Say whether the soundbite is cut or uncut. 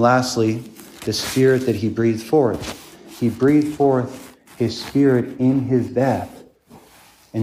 uncut